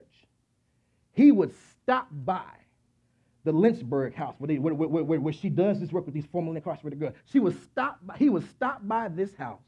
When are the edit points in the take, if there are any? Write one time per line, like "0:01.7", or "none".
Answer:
none